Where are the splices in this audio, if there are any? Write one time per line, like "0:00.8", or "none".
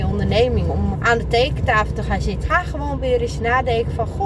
0:00.9
0:02.4